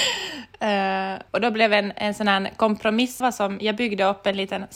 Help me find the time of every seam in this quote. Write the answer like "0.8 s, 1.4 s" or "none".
1.3 s, 3.2 s